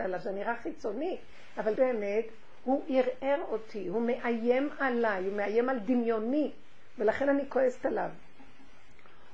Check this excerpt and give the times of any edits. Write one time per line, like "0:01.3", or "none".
0:01.8